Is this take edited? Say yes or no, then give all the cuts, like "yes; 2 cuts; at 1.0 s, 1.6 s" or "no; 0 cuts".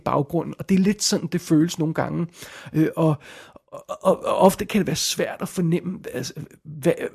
no; 0 cuts